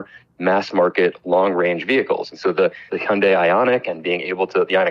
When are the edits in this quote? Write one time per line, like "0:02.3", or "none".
0:02.9